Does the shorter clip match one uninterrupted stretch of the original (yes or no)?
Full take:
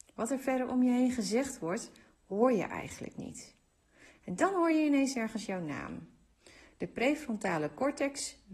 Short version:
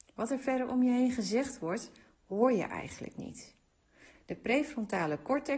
no